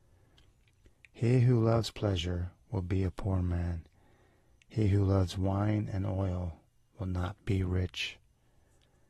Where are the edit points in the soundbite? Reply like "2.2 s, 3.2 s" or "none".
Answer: none